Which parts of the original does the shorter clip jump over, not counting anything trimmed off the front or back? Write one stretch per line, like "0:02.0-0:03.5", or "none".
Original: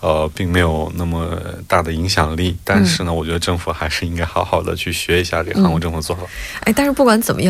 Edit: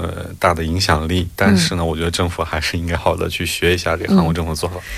0:04.3-0:04.4